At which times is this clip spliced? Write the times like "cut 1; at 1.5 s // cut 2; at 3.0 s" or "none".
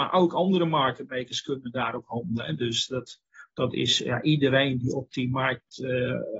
none